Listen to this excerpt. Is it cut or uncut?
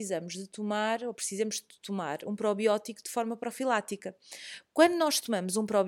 uncut